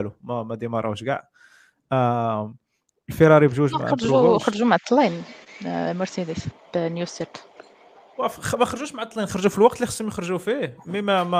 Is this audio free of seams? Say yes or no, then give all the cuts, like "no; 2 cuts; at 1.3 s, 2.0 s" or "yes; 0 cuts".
yes; 0 cuts